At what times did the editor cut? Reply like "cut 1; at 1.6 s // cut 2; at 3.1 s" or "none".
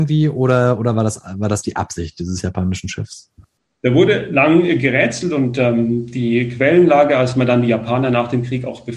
none